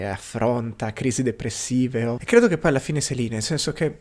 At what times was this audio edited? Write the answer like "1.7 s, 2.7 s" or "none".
2.2 s